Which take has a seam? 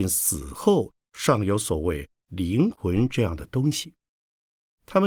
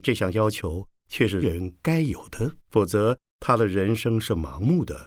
second; 2 cuts; at 1.4 s, 2.6 s

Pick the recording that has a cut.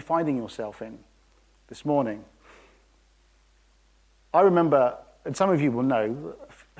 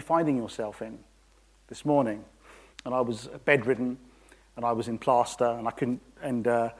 second; 1 cut; at 2.7 s

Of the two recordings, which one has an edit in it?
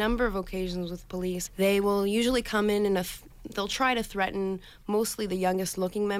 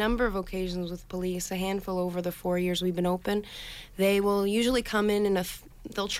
first; 1 cut; at 1.5 s

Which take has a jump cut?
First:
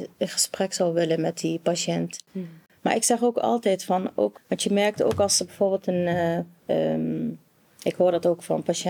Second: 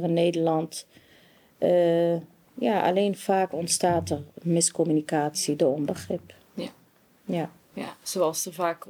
first; 3 cuts; at 2.7 s, 4.3 s, 6.6 s

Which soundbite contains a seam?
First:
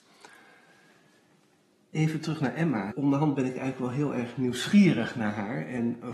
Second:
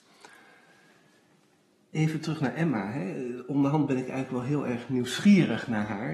first; 1 cut; at 2.9 s

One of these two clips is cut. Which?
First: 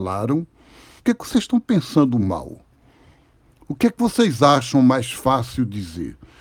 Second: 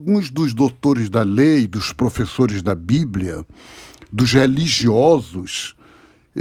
first; 1 cut; at 1.0 s

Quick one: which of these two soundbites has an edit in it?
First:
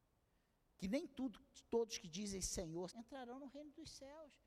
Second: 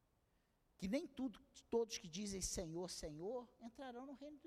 first; 1 cut; at 2.9 s

